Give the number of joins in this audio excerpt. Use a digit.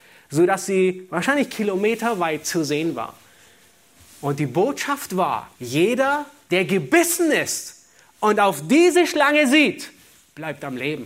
1